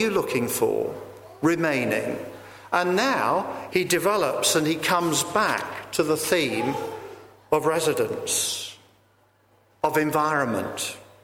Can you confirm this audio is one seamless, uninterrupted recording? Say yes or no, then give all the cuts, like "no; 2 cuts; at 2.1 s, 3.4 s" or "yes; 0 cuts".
no; 1 cut; at 3.7 s